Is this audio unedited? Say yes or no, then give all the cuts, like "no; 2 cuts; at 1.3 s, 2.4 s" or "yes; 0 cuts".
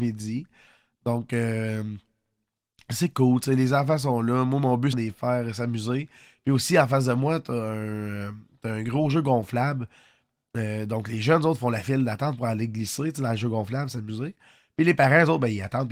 no; 1 cut; at 4.9 s